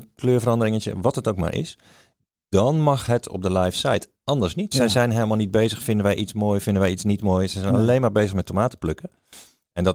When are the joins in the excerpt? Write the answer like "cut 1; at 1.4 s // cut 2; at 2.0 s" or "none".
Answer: cut 1; at 4.7 s